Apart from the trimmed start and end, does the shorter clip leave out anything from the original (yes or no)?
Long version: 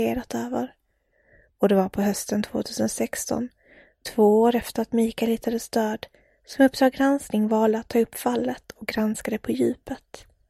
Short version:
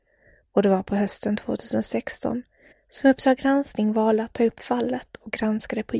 yes